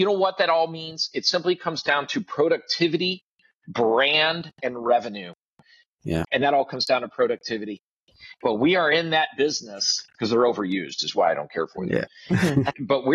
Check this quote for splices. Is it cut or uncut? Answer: cut